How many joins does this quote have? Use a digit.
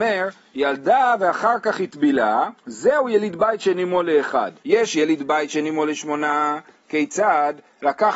2